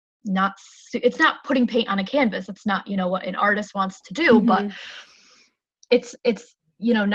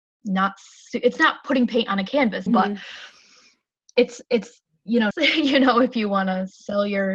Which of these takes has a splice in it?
second; 2 cuts; at 2.5 s, 5.1 s

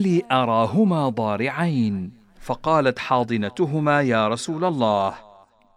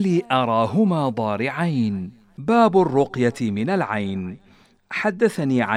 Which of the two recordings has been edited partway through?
second; 1 cut; at 2.3 s

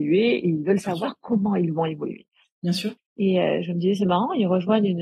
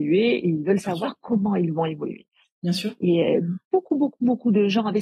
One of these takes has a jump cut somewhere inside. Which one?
first; 1 cut; at 3.0 s

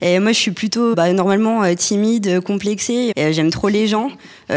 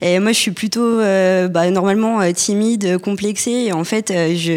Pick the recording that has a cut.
first; 2 cuts; at 0.9 s, 3.1 s

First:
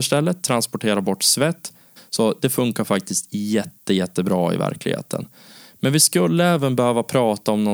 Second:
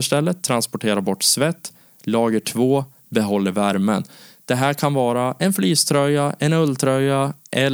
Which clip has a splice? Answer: first; 1 cut; at 2.0 s

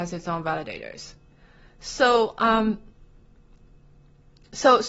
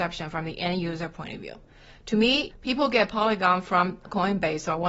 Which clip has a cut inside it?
second; 1 cut; at 2.5 s

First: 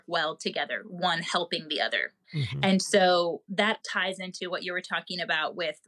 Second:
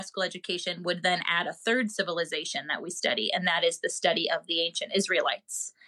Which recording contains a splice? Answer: first; 2 cuts; at 2.2 s, 3.8 s

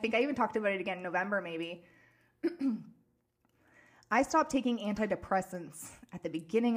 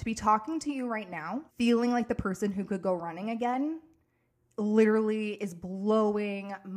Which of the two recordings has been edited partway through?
second; 1 cut; at 1.5 s

